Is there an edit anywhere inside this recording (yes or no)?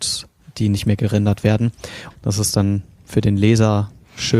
yes